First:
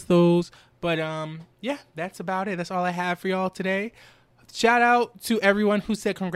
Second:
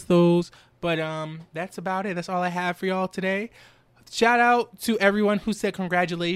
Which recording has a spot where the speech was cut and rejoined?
second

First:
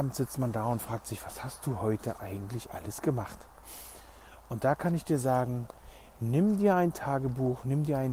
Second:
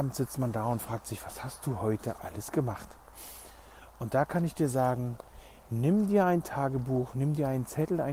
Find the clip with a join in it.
second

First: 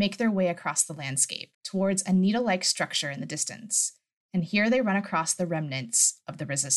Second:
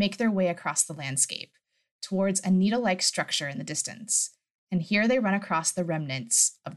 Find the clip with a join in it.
first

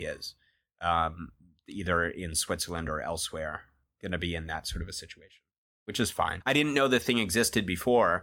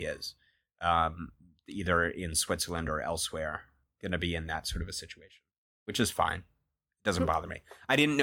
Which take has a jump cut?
first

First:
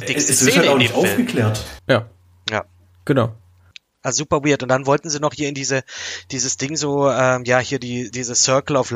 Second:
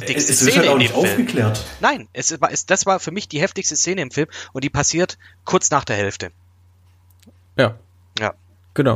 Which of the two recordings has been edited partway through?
first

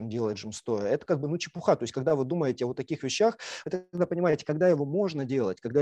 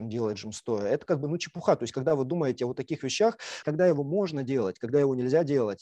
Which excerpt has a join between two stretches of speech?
second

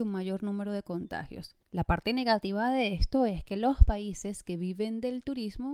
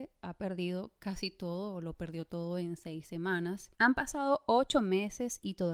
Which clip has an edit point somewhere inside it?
second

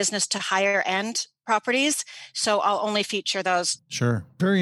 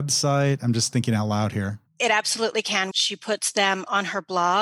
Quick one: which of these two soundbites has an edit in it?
second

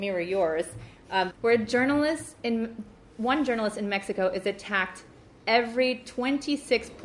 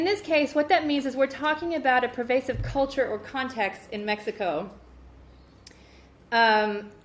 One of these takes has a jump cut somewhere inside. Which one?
first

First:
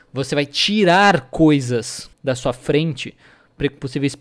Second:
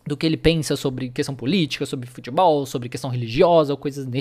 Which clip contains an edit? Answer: first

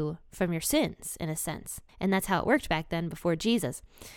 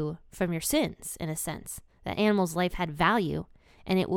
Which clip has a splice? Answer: first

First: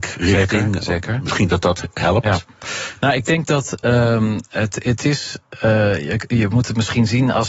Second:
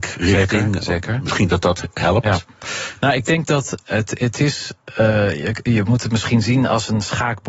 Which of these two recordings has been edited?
second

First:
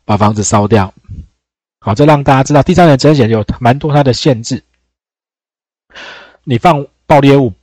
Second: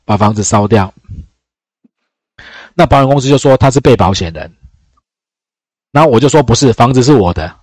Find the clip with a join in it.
first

